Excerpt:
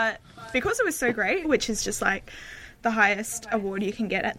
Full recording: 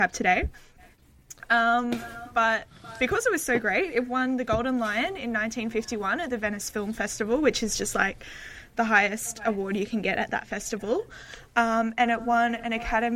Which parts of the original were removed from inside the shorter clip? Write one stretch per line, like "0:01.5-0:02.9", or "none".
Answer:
0:03.9-0:07.4